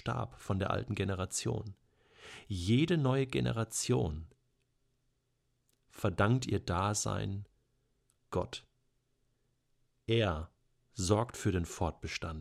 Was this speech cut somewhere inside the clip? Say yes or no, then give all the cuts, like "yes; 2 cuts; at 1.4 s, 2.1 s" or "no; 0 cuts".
no; 0 cuts